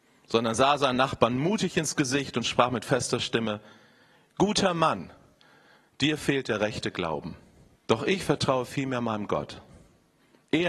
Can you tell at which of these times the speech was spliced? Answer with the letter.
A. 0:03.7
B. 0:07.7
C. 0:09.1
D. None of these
B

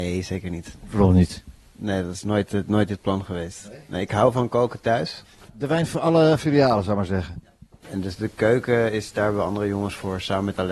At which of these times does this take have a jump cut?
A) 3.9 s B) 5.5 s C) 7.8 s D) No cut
B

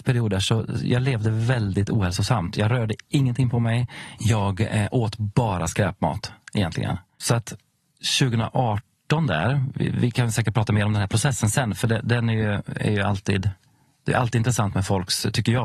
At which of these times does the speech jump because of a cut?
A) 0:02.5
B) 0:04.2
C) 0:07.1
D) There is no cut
B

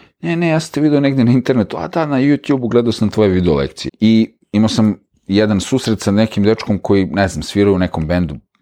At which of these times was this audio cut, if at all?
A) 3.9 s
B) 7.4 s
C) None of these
A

